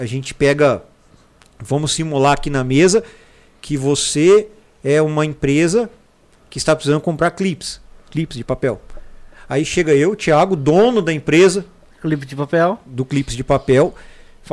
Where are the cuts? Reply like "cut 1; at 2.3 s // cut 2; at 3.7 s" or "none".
none